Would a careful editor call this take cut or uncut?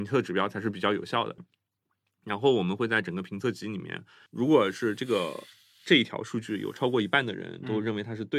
cut